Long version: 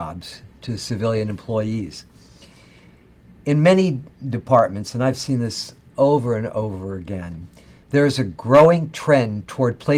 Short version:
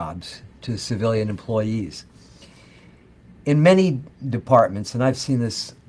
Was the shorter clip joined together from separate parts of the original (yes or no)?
no